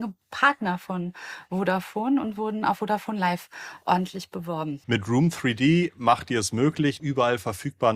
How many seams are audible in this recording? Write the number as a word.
two